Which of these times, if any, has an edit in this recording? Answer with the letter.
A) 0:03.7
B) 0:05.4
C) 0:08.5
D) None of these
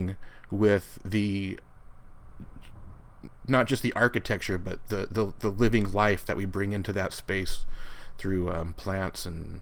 B